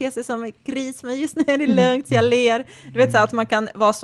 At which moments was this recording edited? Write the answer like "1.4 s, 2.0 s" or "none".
none